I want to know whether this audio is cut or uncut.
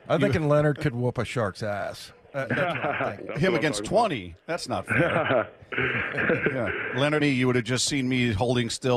cut